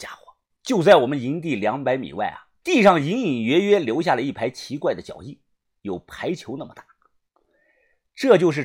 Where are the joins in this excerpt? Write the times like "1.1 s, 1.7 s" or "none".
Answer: 2.6 s